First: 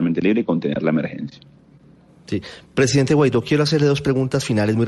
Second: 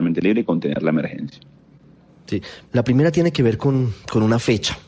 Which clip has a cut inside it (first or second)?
second